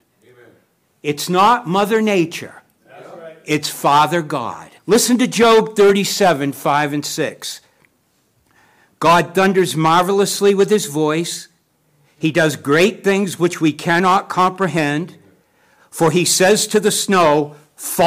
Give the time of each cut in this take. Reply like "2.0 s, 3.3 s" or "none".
4.8 s